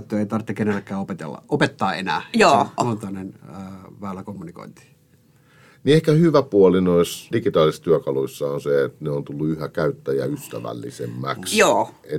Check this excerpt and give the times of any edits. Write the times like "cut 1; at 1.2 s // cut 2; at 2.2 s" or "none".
cut 1; at 2.8 s // cut 2; at 7.3 s